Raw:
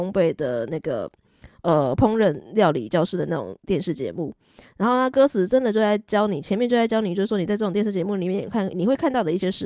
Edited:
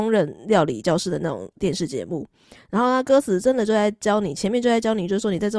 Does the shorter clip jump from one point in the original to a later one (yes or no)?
no